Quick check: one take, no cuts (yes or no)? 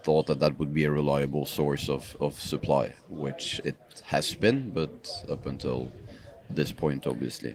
yes